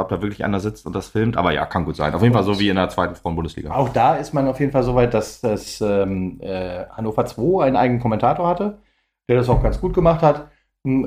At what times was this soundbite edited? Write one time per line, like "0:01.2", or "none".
none